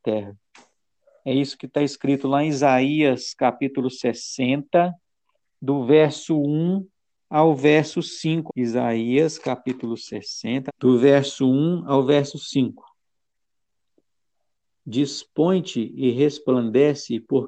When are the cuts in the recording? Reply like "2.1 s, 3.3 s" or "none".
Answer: 8.5 s, 10.7 s